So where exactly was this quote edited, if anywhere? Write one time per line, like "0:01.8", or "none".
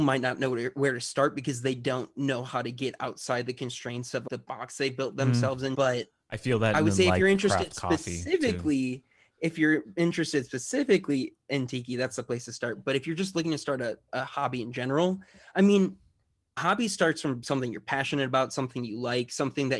0:05.7